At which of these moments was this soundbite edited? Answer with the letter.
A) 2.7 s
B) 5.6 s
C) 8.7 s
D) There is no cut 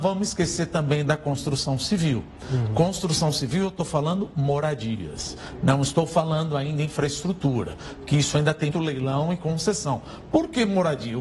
C